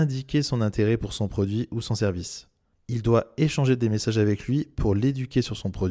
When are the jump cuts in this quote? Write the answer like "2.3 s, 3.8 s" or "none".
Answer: none